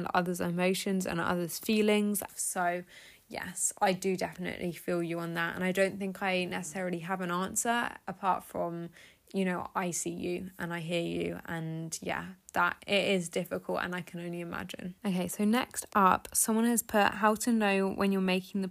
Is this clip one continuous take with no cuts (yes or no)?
no